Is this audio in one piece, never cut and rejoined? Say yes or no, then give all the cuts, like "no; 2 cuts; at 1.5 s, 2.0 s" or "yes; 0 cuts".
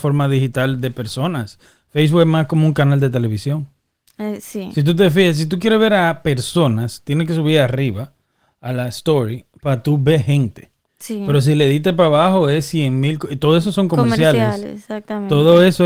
yes; 0 cuts